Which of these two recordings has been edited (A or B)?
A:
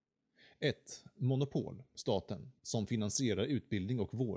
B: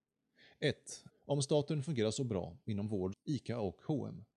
B